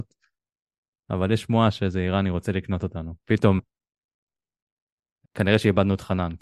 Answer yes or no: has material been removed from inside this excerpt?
yes